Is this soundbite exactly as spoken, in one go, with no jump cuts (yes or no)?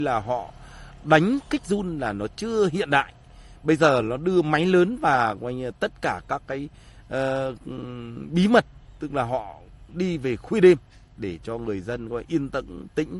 yes